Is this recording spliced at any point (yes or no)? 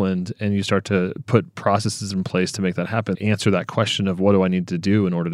yes